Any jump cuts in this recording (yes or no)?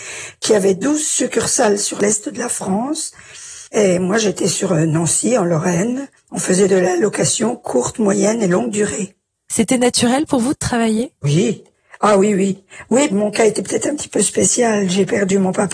yes